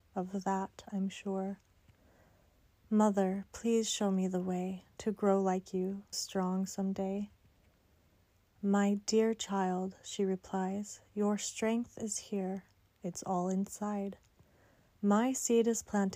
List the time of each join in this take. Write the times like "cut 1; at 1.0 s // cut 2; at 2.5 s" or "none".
cut 1; at 6.1 s